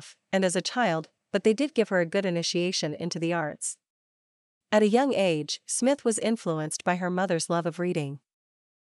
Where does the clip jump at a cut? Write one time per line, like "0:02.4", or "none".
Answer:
0:01.2